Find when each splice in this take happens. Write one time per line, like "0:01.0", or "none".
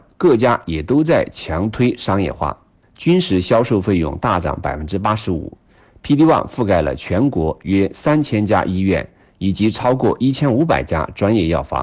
0:02.8

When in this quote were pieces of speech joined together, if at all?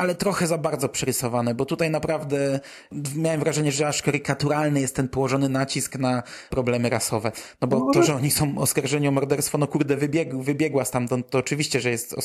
none

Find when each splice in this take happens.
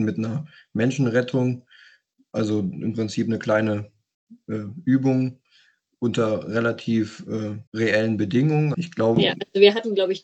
0:07.7
0:08.7

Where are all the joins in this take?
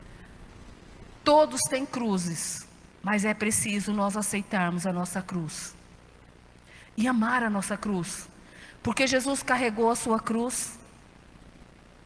0:01.2
0:02.9

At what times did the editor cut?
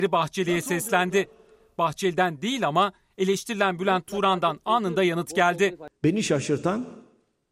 none

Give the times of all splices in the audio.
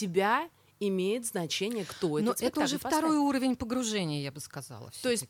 none

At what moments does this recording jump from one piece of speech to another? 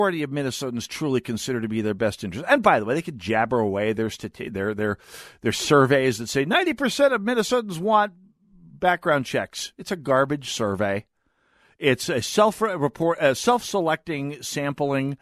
none

